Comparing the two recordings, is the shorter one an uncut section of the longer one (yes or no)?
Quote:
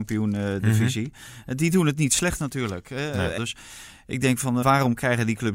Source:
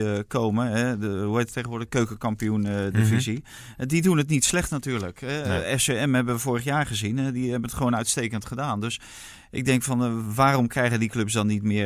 no